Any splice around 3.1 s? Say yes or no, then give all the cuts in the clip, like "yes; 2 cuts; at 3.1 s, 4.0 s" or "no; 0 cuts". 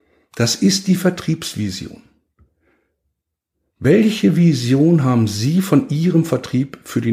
no; 0 cuts